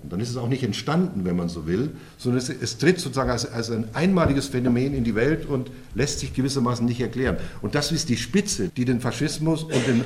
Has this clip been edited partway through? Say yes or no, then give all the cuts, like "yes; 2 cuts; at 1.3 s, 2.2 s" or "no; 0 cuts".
yes; 1 cut; at 8.7 s